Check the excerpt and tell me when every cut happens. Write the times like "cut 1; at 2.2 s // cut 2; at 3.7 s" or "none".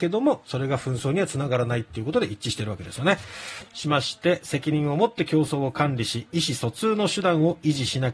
cut 1; at 3.7 s